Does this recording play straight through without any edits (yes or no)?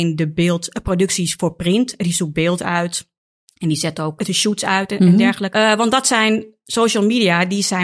no